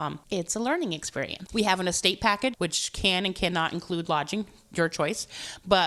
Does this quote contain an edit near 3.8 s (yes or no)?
no